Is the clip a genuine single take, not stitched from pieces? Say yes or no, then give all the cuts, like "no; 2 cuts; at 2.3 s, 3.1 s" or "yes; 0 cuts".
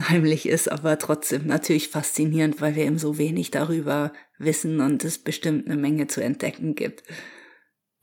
no; 1 cut; at 2.6 s